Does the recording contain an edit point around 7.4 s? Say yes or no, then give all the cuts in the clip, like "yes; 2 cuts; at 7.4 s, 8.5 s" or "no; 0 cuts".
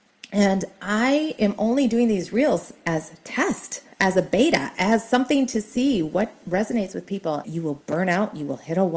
yes; 2 cuts; at 3.9 s, 7.4 s